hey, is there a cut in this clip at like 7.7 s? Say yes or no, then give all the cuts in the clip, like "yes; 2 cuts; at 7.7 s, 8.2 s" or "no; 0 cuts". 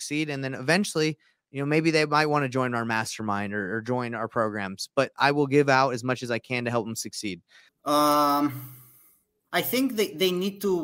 yes; 1 cut; at 7.7 s